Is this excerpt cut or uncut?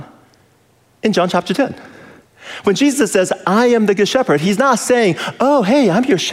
uncut